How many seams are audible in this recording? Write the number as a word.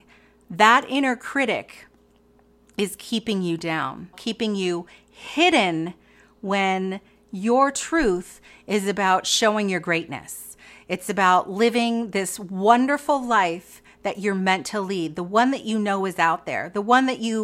one